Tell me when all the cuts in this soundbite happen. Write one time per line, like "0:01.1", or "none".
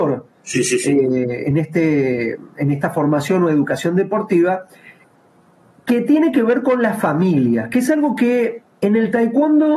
none